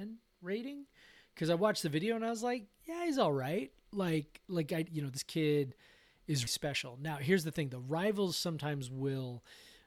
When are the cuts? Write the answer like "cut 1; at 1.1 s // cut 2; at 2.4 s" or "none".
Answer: cut 1; at 4.9 s // cut 2; at 6.5 s